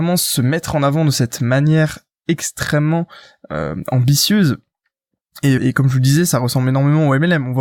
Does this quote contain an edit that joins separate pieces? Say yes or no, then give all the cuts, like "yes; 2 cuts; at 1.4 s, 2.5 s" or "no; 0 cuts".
yes; 1 cut; at 5.6 s